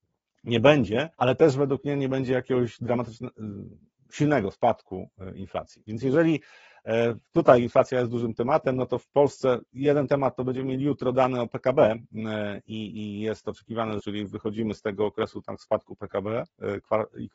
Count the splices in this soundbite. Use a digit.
2